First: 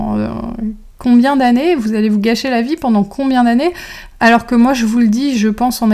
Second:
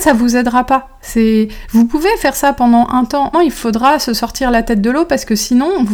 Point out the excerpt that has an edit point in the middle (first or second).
second